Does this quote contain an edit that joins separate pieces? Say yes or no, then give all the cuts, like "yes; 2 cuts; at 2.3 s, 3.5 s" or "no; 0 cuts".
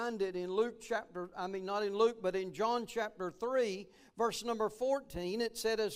no; 0 cuts